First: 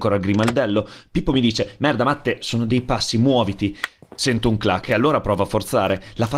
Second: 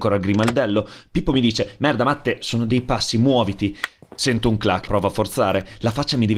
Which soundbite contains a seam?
second; 1 cut; at 4.9 s

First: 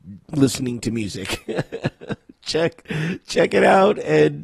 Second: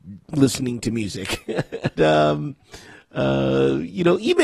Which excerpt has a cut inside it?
second; 1 cut; at 2.0 s

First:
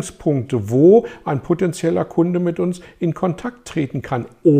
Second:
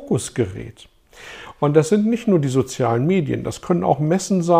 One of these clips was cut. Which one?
second; 1 cut; at 1.6 s

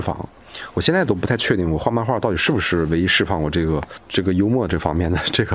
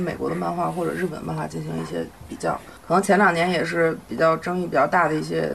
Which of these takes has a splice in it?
second; 1 cut; at 2.8 s

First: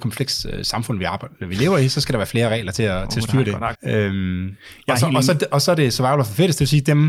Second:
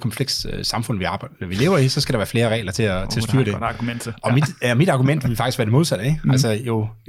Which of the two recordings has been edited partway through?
first; 1 cut; at 3.7 s

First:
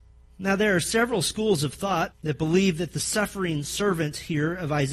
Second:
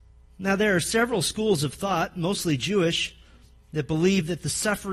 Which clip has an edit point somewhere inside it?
first; 1 cut; at 2.1 s

